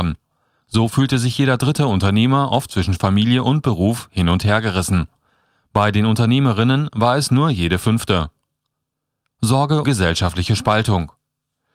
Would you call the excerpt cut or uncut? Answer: cut